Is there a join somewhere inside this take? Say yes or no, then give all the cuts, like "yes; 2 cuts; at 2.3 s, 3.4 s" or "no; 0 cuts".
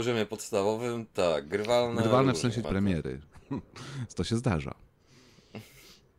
yes; 1 cut; at 2.6 s